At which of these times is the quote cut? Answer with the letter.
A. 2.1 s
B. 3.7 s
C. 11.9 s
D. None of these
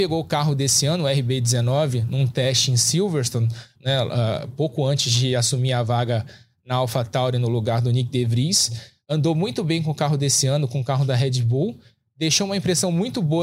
B